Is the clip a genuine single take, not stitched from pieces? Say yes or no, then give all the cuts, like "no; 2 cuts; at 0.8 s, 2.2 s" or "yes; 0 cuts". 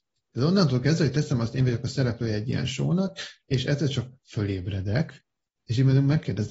no; 1 cut; at 5.5 s